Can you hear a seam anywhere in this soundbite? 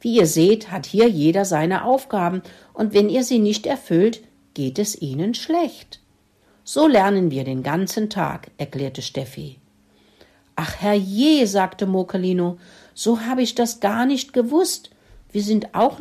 no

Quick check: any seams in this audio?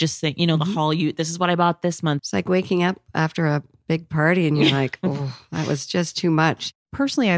yes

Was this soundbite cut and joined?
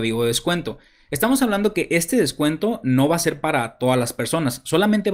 no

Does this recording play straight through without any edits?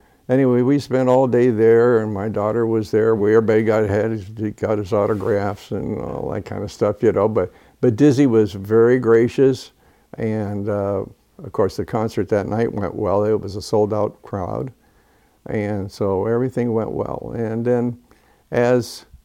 yes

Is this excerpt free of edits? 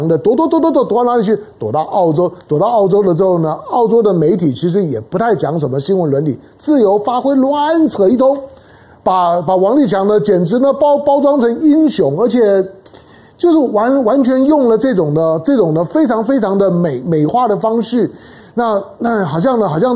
yes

